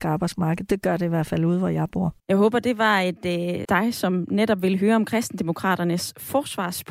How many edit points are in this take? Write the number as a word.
two